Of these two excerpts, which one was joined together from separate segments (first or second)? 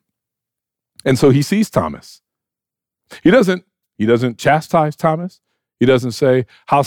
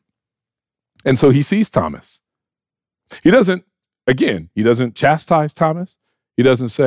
first